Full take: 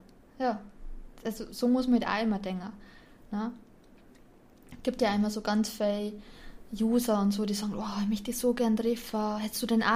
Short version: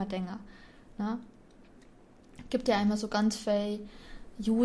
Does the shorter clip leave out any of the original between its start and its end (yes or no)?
no